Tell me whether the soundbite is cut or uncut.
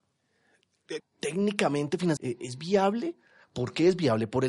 cut